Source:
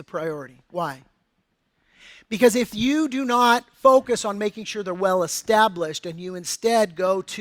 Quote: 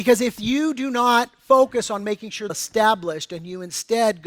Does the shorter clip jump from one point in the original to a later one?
yes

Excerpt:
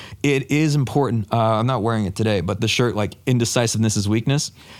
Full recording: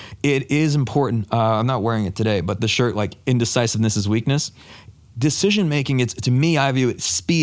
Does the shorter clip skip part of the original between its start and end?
no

